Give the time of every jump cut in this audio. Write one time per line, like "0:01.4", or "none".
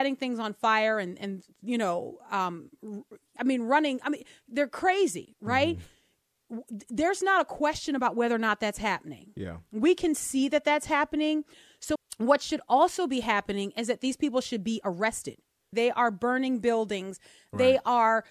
0:03.4
0:12.0
0:15.7

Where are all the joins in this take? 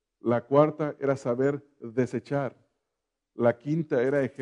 none

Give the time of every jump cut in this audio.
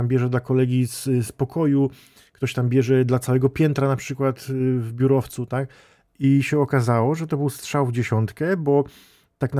none

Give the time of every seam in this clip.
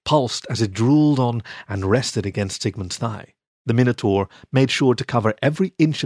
0:03.5

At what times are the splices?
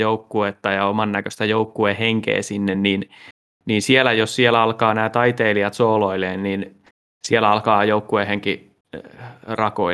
none

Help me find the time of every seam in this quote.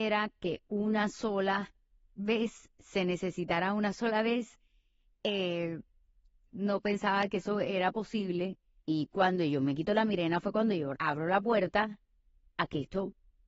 0:06.5
0:08.8
0:10.9

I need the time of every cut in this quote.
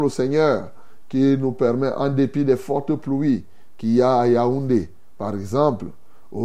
none

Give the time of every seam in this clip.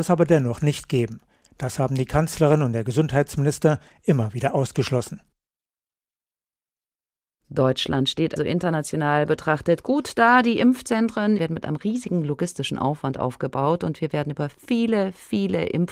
0:08.4
0:11.4

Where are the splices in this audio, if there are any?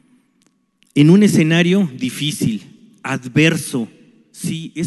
none

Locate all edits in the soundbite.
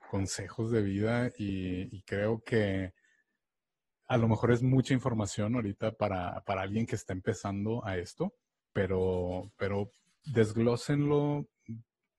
none

